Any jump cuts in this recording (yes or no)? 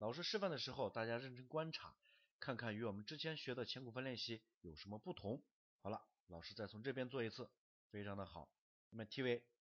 no